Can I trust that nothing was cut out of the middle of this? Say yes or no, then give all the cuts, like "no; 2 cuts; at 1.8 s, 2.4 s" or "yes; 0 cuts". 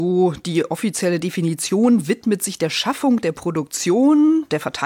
yes; 0 cuts